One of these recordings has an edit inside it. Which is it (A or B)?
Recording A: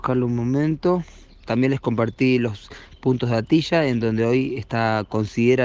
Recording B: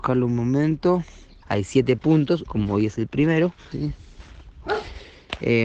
B